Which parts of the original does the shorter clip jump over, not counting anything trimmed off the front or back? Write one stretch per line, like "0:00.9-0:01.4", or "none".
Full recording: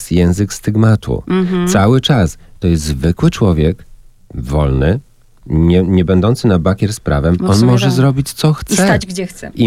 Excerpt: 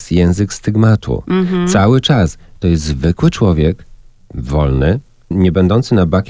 0:05.3-0:05.8